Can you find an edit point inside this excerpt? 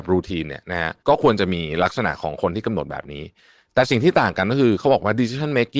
yes; 1 cut; at 1.0 s

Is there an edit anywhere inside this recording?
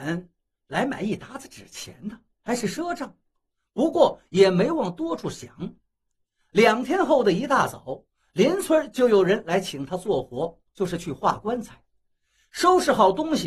no; 0 cuts

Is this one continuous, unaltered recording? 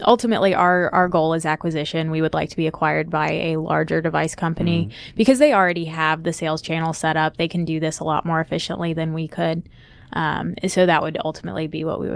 yes; 0 cuts

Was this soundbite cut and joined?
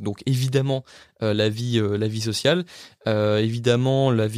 no; 0 cuts

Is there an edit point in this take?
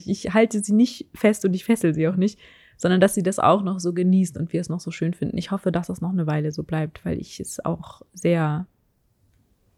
no; 0 cuts

